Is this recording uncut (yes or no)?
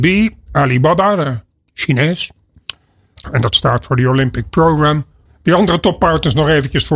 no